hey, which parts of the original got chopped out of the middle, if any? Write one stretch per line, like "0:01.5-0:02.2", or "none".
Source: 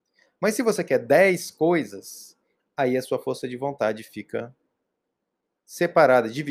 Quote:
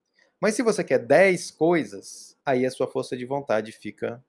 0:02.4-0:02.7